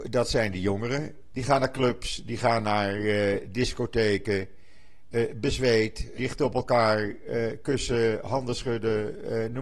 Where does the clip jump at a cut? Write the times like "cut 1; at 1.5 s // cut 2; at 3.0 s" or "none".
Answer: cut 1; at 1.3 s // cut 2; at 6.2 s